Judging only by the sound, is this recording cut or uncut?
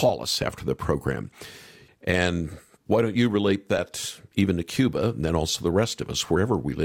cut